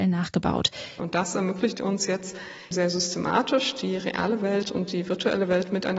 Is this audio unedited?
no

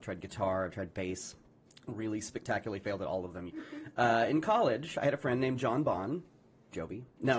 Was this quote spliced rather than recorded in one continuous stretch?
yes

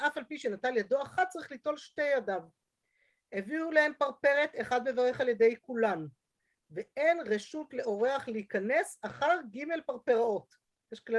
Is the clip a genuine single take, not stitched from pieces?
yes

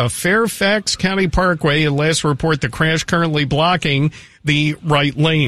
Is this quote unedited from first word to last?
yes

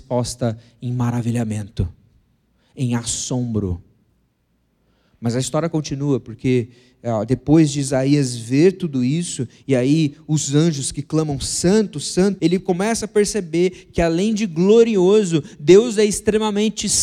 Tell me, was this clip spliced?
yes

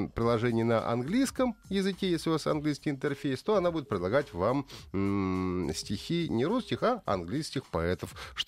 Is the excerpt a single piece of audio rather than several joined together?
yes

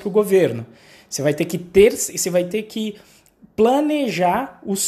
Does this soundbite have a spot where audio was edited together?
no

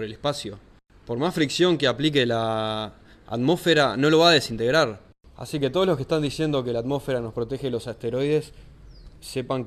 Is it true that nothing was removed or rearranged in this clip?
yes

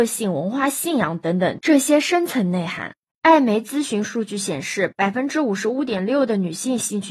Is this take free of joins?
no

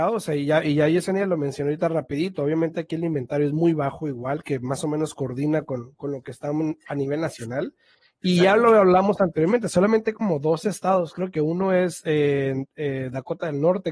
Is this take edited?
no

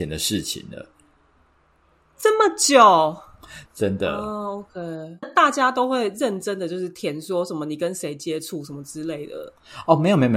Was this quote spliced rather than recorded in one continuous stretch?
yes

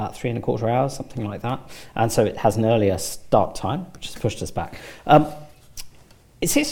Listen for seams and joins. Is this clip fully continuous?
yes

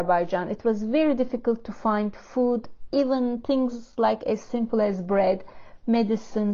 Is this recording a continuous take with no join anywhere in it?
yes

